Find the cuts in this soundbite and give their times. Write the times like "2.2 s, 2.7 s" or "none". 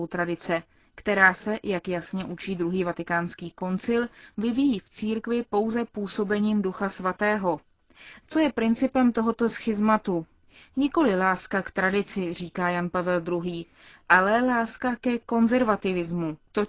8.2 s